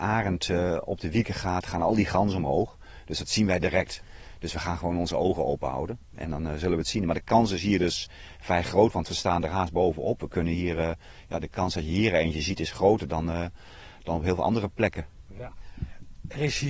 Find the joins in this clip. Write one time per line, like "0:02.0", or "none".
none